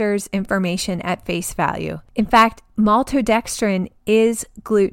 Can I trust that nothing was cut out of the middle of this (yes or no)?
yes